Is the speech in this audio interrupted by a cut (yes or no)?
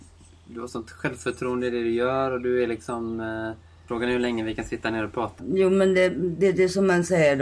yes